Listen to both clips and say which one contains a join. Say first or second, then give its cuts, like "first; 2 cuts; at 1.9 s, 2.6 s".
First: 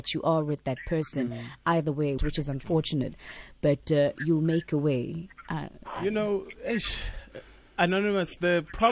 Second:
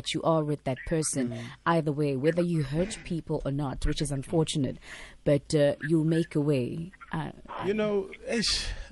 first; 1 cut; at 2.2 s